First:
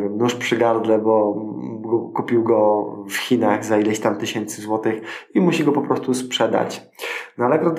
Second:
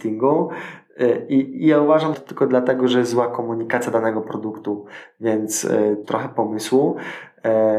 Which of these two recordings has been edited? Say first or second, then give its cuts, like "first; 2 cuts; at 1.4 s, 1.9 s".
second; 2 cuts; at 2.1 s, 6.0 s